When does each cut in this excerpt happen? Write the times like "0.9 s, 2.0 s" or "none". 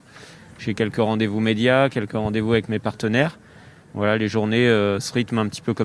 none